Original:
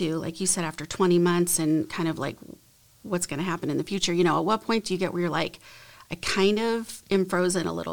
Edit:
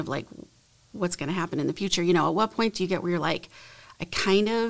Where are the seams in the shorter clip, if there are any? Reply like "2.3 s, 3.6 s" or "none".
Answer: none